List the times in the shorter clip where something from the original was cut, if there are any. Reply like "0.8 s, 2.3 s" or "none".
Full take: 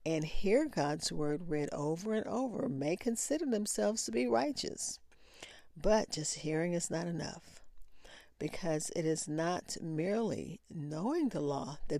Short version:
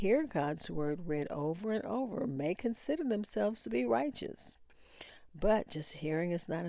none